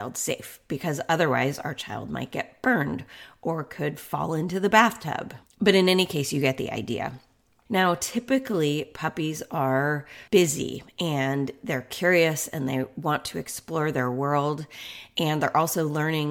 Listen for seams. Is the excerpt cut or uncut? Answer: cut